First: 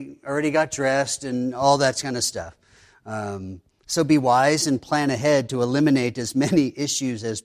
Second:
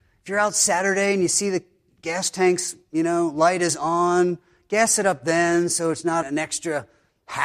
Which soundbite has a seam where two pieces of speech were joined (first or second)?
second